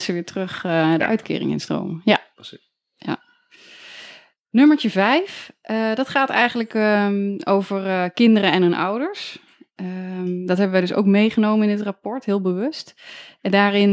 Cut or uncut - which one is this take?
uncut